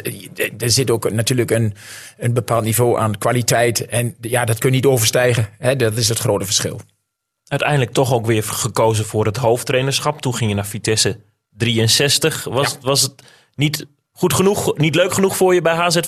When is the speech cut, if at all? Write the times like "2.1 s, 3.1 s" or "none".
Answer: none